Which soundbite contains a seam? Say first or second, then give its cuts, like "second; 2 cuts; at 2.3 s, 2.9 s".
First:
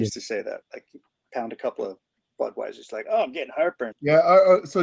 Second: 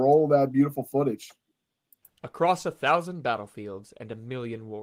first; 1 cut; at 3.9 s